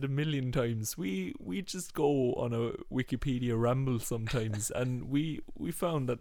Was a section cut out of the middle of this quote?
no; 0 cuts

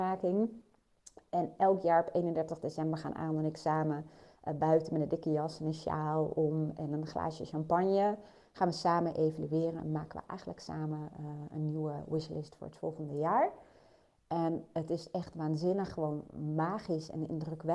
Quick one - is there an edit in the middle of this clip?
no; 0 cuts

